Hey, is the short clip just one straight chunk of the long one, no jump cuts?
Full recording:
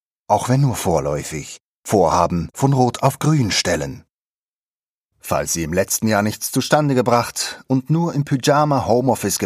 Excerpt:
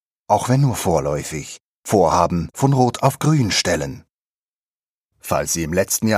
yes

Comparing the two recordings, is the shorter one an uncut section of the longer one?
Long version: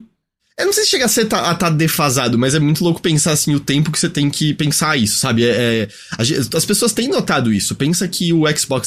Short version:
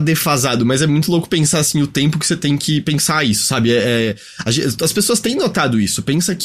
yes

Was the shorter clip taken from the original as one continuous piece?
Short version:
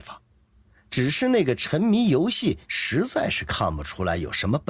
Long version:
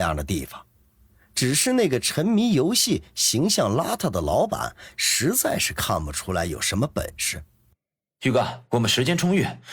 no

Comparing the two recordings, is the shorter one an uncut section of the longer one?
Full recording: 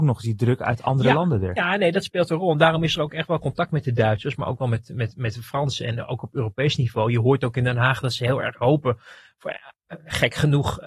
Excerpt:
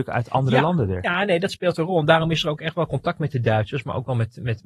yes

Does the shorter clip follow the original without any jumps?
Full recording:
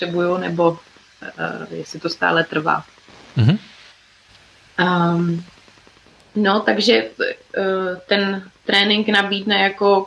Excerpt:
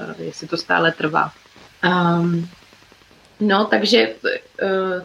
no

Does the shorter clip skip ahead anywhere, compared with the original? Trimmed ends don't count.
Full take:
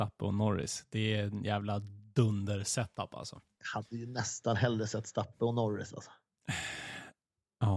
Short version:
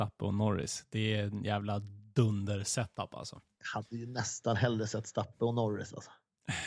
no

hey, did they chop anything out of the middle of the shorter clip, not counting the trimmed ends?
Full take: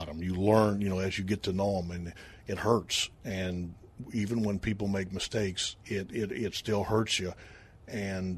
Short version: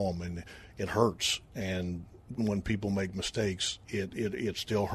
yes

